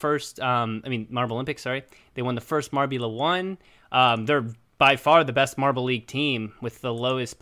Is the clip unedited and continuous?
yes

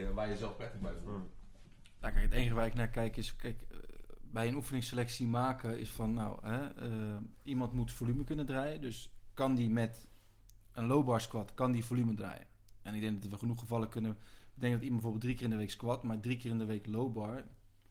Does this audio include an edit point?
yes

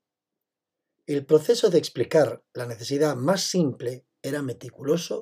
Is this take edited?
yes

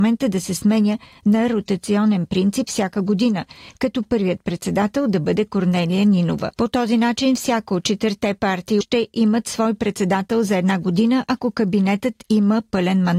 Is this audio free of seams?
no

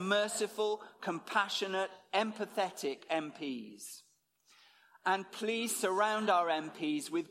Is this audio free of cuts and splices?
yes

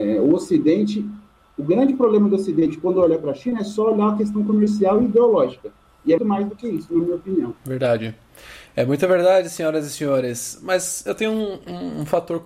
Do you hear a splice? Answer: yes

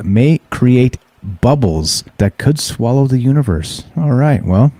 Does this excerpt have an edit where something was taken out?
yes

